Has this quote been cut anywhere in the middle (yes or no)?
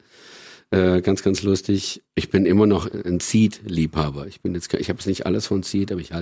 no